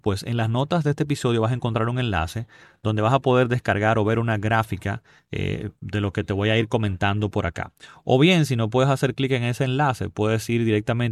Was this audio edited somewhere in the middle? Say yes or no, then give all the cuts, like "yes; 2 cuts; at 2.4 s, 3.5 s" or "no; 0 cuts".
no; 0 cuts